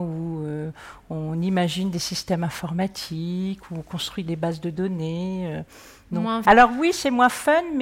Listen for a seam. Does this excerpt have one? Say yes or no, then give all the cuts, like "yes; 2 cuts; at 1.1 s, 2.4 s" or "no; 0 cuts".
yes; 1 cut; at 6.5 s